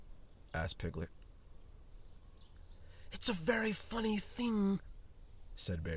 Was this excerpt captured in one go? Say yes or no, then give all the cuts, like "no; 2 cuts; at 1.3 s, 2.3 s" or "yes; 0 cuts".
yes; 0 cuts